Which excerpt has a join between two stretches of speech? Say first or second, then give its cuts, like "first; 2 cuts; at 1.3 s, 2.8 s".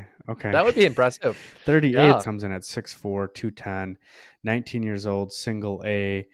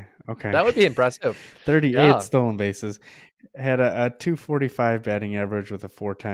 first; 1 cut; at 2.2 s